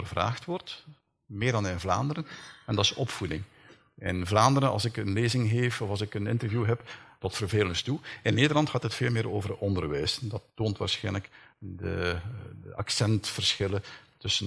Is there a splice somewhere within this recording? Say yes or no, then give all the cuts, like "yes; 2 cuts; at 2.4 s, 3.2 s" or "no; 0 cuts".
yes; 1 cut; at 7.2 s